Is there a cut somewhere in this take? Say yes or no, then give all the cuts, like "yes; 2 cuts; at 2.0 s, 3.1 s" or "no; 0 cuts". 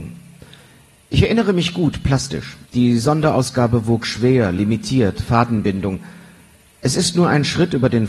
yes; 1 cut; at 2.6 s